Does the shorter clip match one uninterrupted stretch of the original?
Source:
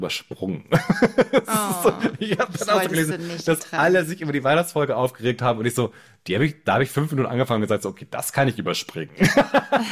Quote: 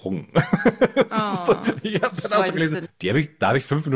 no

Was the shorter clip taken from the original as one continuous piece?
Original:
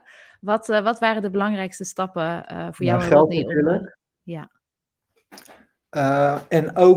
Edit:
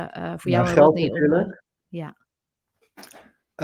yes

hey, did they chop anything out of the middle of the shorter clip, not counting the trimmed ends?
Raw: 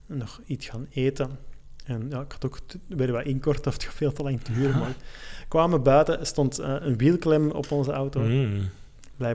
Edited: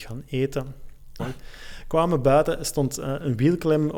yes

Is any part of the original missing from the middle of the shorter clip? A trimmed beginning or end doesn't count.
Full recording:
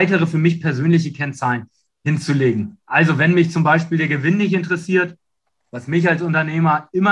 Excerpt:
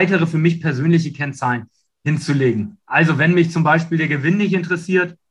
no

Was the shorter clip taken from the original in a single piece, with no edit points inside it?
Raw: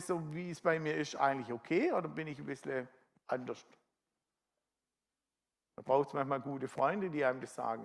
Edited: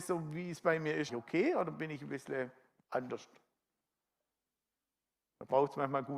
no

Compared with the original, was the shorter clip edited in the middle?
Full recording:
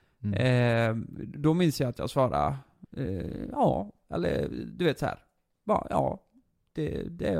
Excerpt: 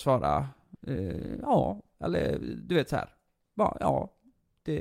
no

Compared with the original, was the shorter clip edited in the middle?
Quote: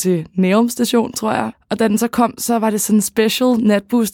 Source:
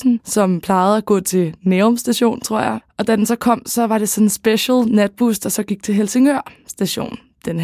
no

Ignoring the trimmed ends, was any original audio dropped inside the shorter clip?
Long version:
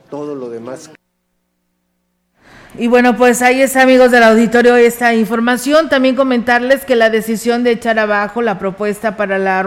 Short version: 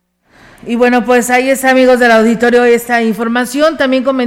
no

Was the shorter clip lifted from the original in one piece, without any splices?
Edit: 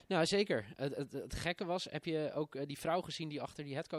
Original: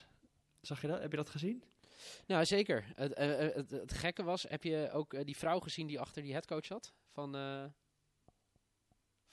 no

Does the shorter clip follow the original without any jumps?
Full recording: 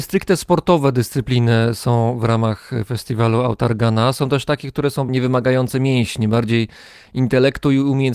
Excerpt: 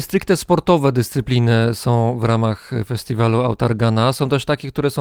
yes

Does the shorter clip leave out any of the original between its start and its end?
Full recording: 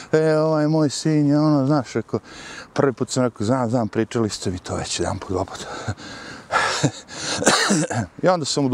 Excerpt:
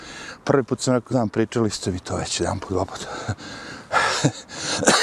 yes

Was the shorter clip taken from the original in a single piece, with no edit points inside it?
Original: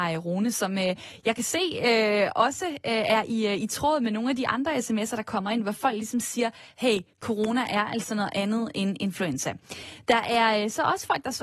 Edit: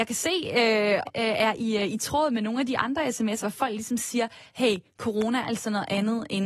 no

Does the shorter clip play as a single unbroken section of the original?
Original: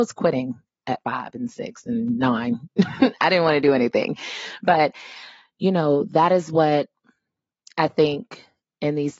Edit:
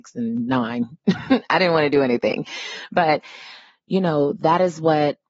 yes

